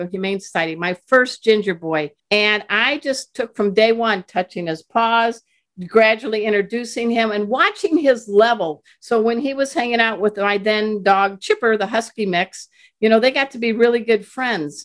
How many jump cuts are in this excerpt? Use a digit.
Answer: 1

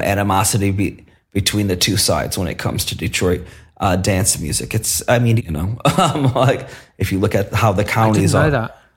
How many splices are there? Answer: 1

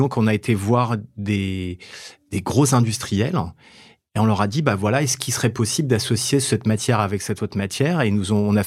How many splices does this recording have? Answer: 0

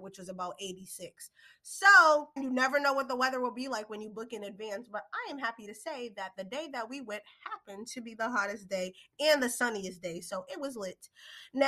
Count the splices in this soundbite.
1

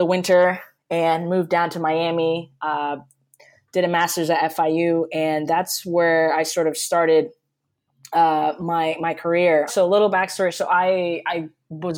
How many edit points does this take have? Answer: 1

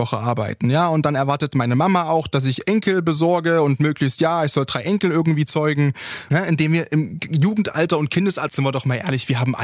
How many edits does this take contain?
2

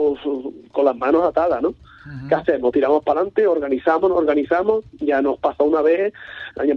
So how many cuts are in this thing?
0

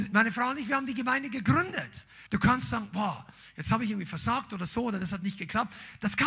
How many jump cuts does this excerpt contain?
1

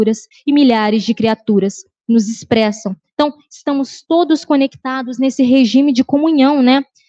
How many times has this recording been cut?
0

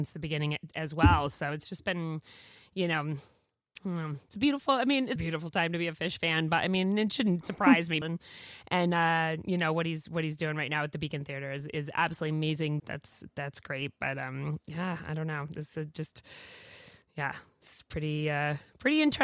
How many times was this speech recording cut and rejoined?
3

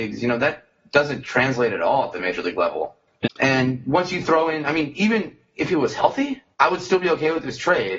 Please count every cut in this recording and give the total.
2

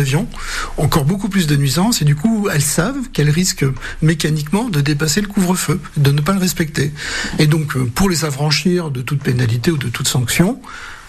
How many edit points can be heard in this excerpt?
0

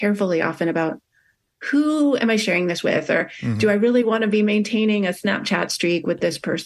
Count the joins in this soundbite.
0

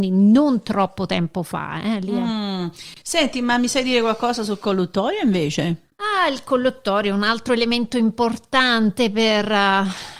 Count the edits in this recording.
0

